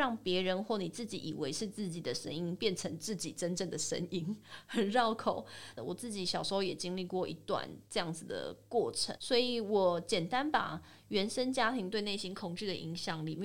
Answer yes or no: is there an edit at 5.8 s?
yes